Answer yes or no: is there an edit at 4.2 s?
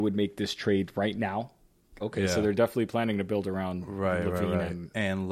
no